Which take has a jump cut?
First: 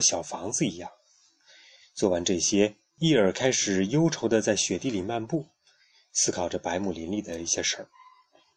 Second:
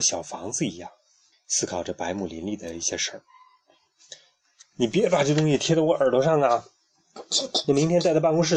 second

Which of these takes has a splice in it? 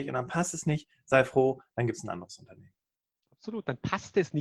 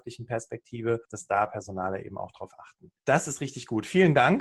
second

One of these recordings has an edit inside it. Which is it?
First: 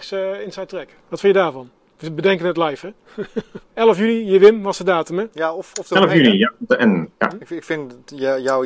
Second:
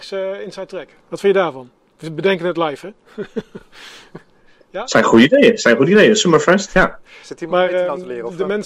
first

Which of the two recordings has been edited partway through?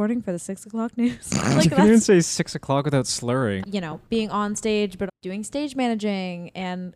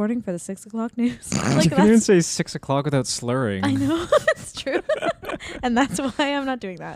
first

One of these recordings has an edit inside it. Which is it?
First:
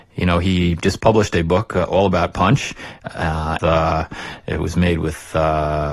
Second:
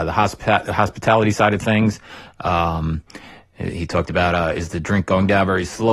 first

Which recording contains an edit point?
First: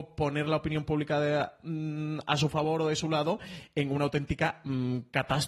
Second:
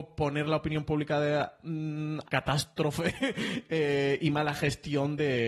second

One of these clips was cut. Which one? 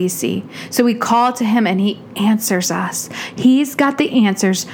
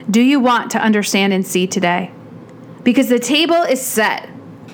second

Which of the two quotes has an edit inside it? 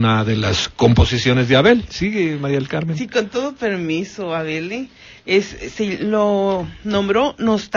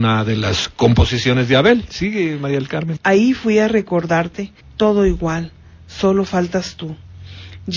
second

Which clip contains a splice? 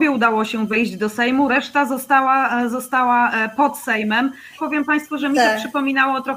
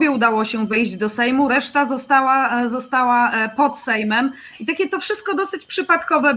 first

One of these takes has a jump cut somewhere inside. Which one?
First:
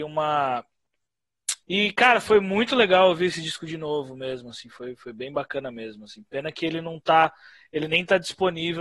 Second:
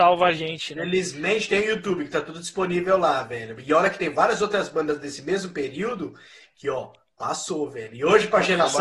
first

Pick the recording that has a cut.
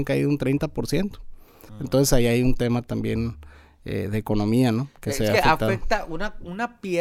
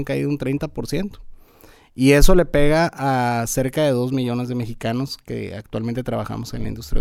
first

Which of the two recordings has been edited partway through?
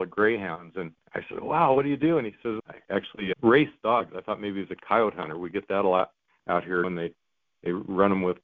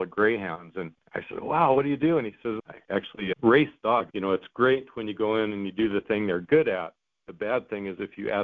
second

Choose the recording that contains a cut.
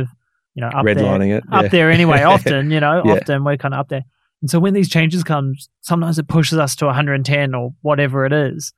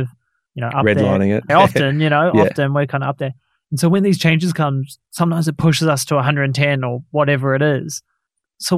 second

